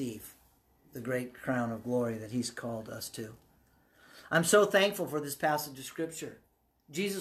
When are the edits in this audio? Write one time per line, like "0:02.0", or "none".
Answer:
none